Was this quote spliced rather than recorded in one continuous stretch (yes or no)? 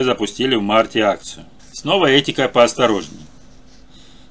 yes